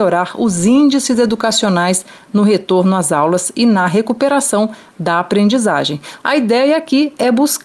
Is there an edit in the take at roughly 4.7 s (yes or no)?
no